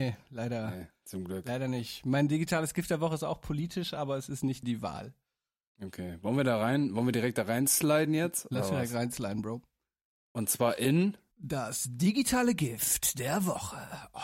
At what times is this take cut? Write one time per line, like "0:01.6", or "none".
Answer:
0:04.6